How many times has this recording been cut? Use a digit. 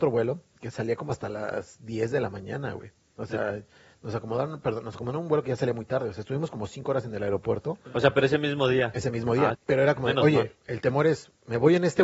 1